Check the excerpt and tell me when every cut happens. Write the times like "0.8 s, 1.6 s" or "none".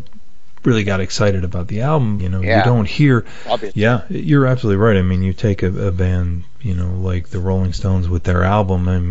2.2 s, 3.7 s

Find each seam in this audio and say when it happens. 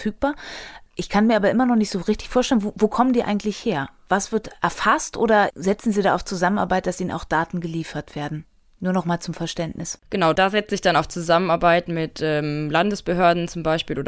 none

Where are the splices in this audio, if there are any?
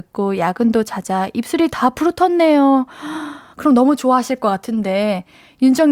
3.5 s

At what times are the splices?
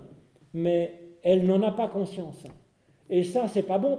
none

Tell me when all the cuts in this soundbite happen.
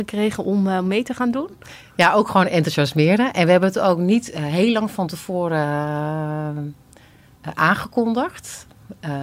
none

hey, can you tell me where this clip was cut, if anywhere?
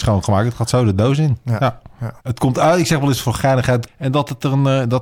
2.2 s, 3.9 s

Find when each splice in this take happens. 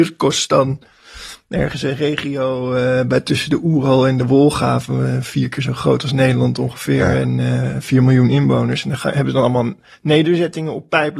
none

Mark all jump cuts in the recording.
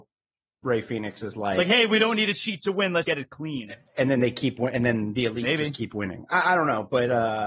3.0 s

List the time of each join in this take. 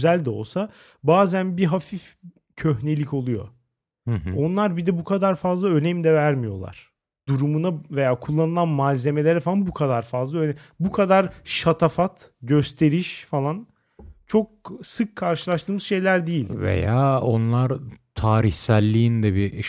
7.3 s

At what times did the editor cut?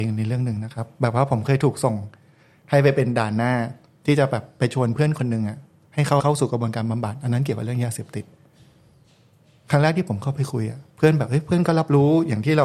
10.9 s

